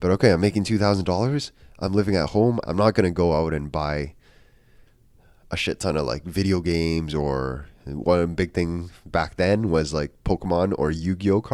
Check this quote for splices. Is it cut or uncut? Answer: cut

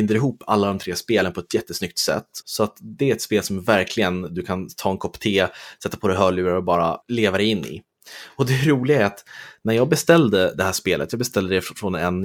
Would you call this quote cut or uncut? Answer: cut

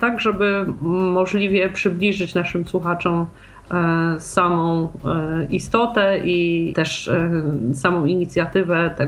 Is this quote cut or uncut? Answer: cut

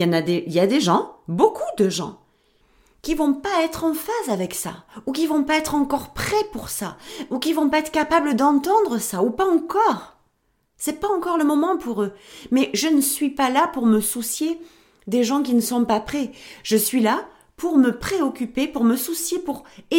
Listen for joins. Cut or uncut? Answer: uncut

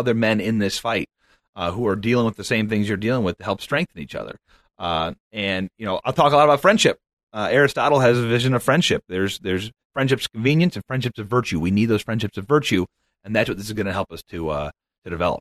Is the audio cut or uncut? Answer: uncut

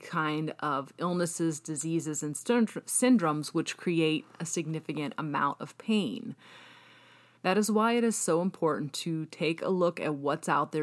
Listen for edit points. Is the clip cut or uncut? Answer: cut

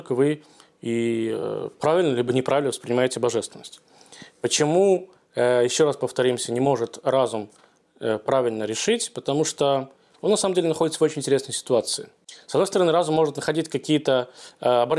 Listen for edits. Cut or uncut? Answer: uncut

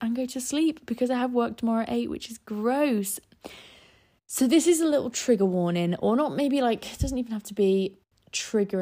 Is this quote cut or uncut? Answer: uncut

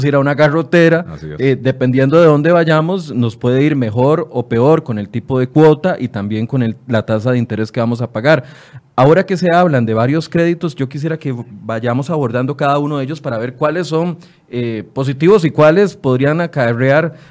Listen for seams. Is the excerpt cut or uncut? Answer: uncut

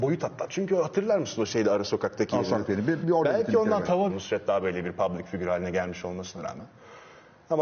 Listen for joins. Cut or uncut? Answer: cut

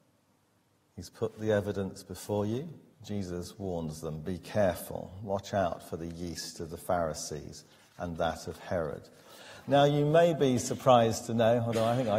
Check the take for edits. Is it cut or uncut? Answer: cut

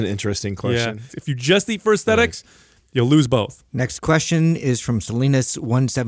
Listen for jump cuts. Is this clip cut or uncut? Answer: cut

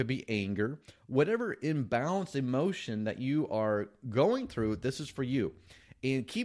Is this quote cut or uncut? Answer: uncut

